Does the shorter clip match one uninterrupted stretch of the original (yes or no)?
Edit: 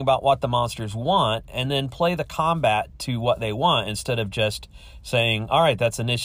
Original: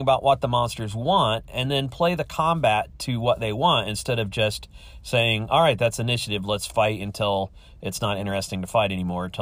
yes